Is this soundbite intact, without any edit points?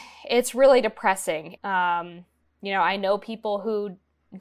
no; 1 cut; at 1.6 s

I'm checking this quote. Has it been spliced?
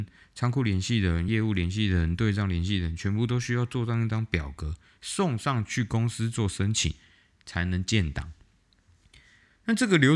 no; 0 cuts

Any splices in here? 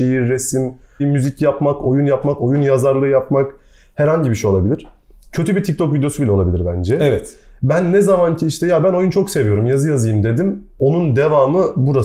yes; 1 cut; at 1.0 s

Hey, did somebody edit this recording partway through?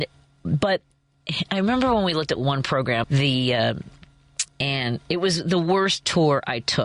yes; 2 cuts; at 3.0 s, 4.5 s

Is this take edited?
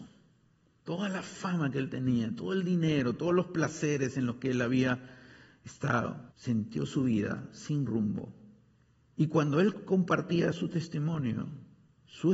yes; 2 cuts; at 6.3 s, 9.1 s

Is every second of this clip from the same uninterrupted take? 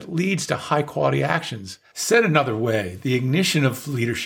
no; 1 cut; at 1.9 s

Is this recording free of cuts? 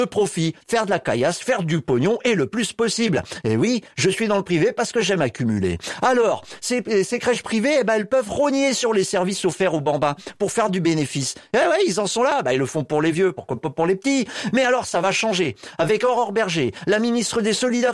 yes; 0 cuts

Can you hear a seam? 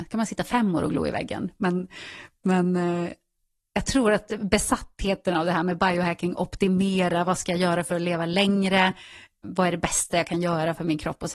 yes; 1 cut; at 9.4 s

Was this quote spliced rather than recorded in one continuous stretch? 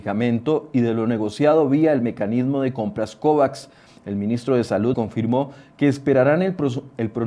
yes; 1 cut; at 4.9 s

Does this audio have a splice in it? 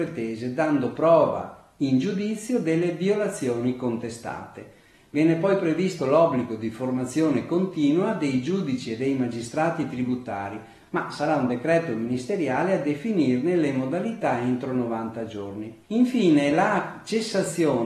yes; 1 cut; at 15.8 s

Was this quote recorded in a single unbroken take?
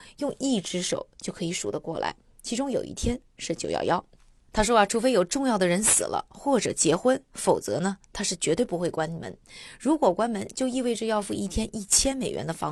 yes; 0 cuts

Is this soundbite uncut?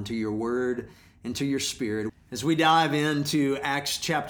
no; 1 cut; at 2.1 s

